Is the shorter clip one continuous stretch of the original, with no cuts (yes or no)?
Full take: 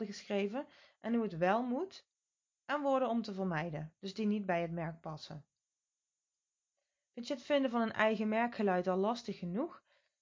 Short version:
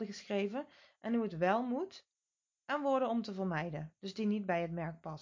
yes